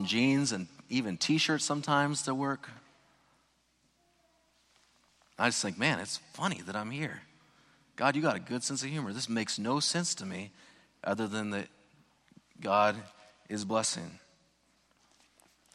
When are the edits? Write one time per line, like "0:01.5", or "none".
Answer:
none

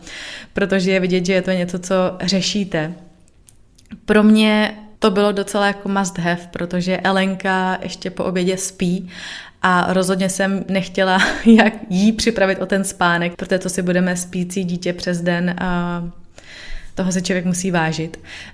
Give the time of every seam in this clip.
0:05.0
0:13.3

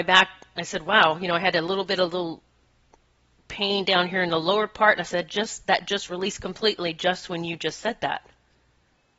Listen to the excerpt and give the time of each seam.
none

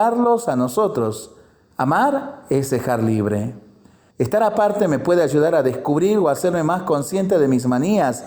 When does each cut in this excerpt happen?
0:01.7
0:04.1

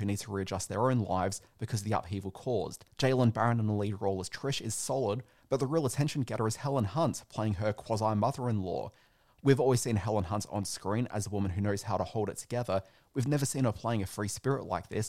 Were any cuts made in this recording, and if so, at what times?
0:02.9

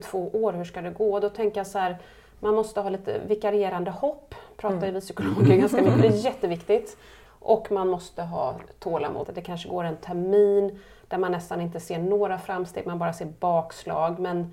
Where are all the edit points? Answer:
0:07.3
0:09.2

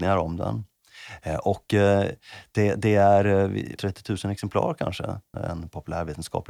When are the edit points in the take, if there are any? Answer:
0:03.8
0:05.3

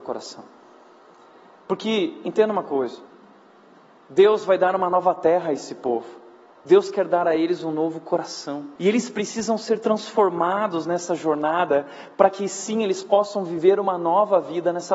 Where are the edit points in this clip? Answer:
0:06.6
0:08.8

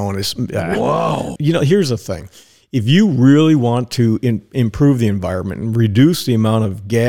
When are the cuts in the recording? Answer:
0:01.4

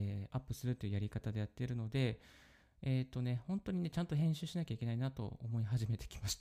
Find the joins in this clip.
none

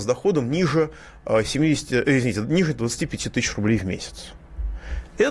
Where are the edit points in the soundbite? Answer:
none

